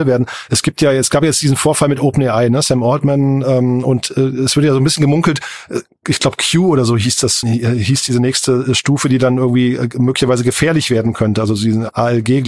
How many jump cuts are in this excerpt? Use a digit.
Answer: 1